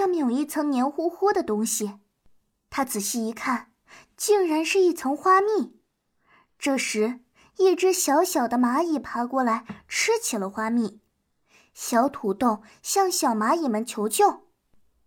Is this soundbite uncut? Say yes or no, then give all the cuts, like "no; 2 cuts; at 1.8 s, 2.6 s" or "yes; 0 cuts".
yes; 0 cuts